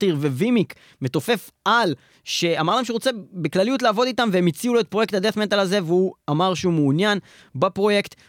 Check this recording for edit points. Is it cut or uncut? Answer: uncut